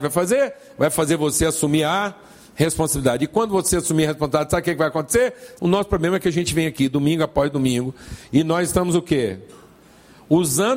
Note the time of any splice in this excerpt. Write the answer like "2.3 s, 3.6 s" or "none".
5.6 s

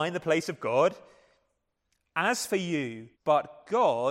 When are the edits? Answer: 3.1 s

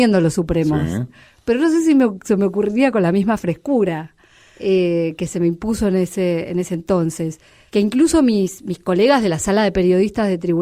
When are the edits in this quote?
none

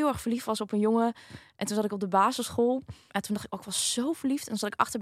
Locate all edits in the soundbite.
3.1 s

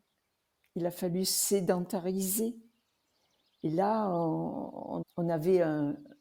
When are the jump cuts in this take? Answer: 5.0 s

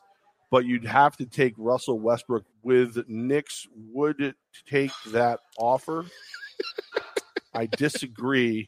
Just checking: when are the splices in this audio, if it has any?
2.5 s

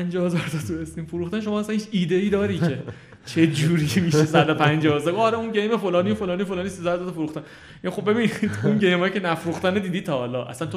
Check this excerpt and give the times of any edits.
none

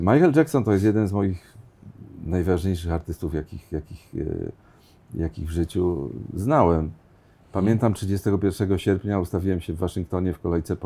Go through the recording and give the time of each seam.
none

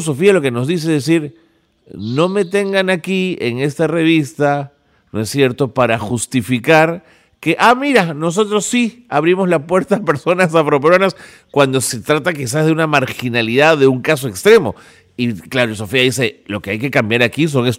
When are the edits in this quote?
none

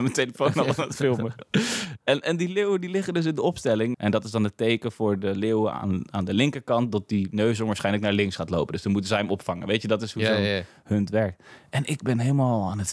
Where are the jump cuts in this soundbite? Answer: 3.9 s

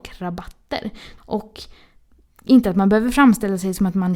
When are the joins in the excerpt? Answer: 1.2 s

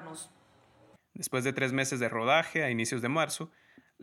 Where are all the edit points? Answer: 1.0 s

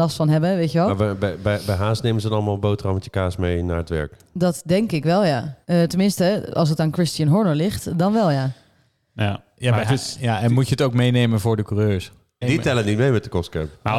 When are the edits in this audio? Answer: 5.6 s, 12.4 s

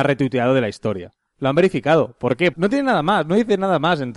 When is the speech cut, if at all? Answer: 1.3 s, 2.5 s

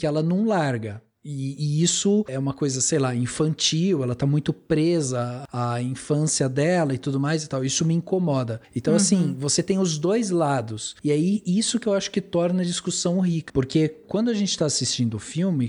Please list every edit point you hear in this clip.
8.6 s, 13.5 s

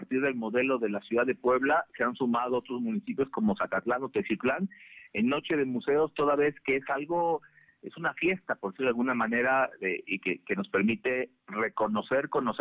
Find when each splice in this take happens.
none

